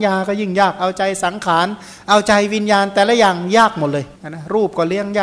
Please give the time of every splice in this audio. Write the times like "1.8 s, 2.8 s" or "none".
4.2 s